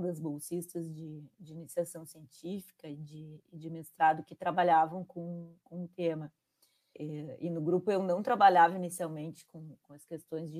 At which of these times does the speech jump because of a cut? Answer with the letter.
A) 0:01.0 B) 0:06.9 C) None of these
B